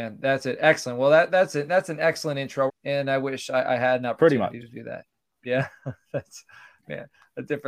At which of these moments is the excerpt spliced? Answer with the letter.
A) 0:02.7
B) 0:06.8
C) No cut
A